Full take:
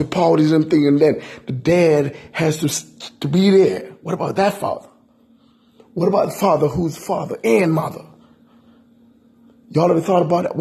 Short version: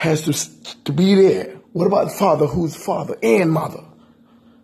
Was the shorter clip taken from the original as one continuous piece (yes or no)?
no